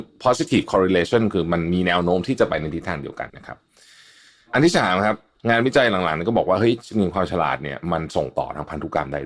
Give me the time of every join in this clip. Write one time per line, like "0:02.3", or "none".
0:03.3